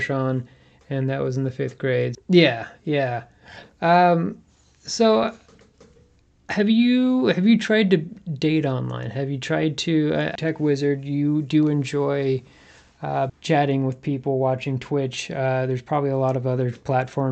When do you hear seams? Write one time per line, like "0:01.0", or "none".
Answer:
0:02.1
0:10.4
0:13.3